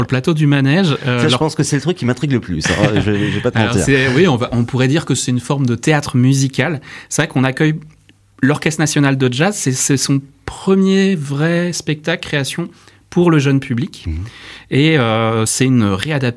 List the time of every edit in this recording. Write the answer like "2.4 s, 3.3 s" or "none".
none